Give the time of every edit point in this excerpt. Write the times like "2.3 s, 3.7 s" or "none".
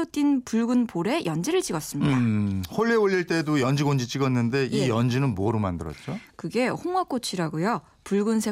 none